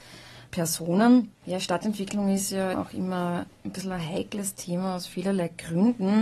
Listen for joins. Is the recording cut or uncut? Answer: cut